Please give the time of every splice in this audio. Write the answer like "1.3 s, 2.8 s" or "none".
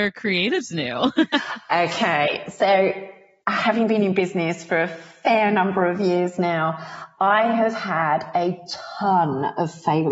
none